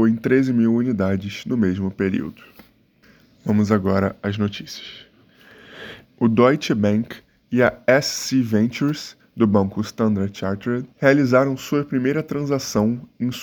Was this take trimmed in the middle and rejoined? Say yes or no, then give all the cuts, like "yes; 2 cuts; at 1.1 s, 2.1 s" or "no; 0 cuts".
yes; 2 cuts; at 6.0 s, 10.9 s